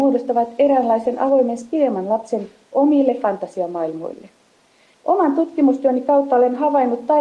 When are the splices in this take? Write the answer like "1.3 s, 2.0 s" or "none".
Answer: 4.9 s